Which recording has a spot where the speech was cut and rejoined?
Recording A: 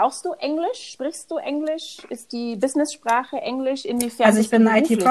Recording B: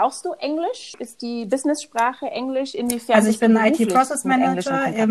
B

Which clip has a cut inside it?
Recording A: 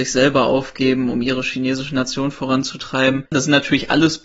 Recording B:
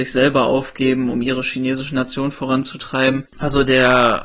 B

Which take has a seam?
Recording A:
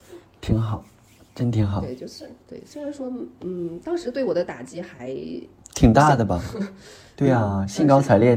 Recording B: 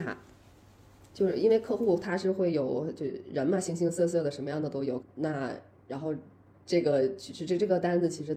B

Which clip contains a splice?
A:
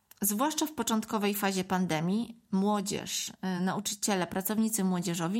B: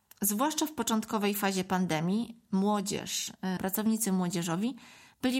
B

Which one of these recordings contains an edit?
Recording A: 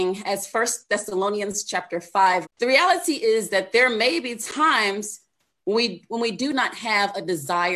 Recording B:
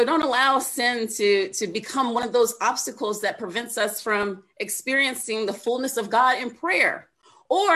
A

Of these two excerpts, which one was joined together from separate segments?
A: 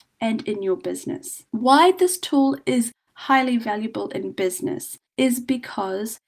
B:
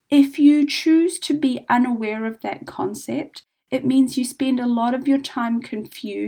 A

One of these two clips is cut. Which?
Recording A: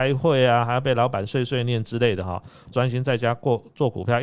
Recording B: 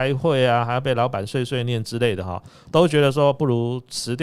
A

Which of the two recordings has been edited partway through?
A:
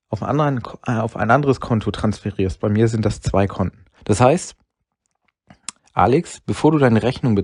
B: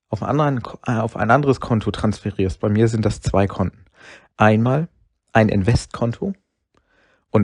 A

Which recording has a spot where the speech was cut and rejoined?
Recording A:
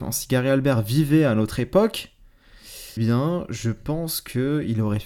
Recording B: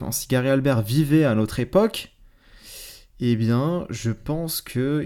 A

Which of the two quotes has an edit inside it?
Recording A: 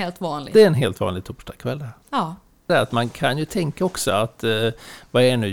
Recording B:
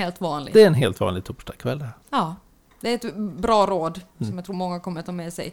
A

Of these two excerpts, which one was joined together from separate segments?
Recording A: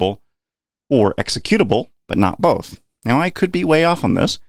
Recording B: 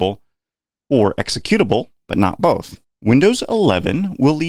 B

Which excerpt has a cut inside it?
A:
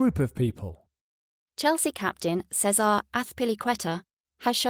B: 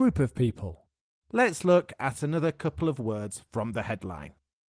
B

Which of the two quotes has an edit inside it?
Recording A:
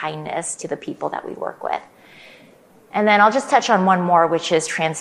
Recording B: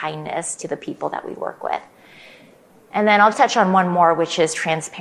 B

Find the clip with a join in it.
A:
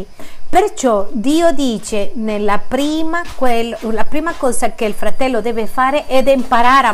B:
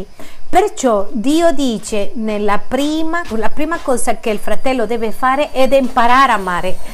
B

